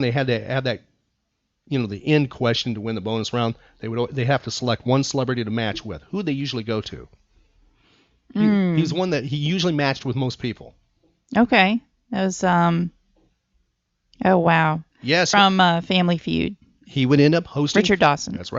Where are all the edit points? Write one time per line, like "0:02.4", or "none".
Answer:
0:15.3